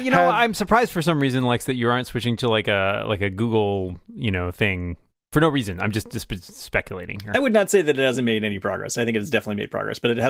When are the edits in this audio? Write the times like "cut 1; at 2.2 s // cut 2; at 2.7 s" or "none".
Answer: none